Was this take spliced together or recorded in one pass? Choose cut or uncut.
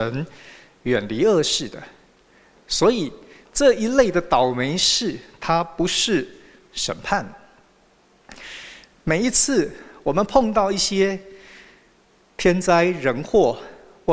uncut